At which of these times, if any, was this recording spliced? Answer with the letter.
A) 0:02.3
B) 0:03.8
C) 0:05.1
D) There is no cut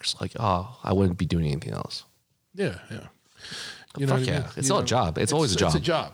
B